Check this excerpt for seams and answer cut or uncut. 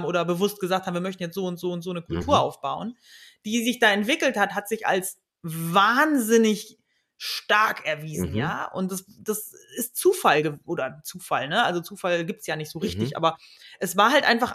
uncut